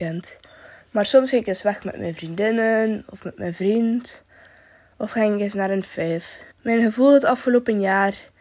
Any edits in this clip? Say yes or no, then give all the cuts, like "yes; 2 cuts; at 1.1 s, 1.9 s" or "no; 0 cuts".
yes; 1 cut; at 6.5 s